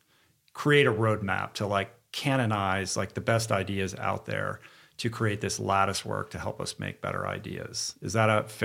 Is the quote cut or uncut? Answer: uncut